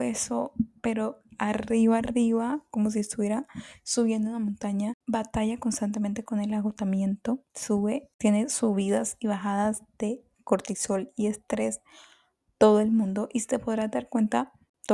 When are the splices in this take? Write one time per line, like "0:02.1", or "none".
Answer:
0:07.5